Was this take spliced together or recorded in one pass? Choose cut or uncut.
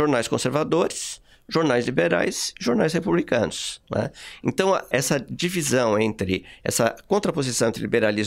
cut